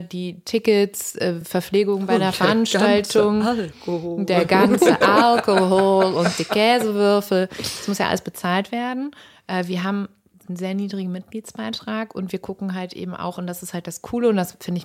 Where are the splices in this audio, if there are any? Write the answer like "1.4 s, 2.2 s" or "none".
none